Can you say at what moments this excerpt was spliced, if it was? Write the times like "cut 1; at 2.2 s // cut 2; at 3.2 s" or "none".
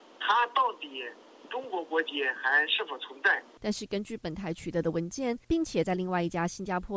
cut 1; at 3.6 s // cut 2; at 5.4 s